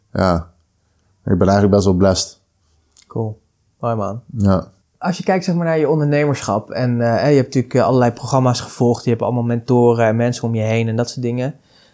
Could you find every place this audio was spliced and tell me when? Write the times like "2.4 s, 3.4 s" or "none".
none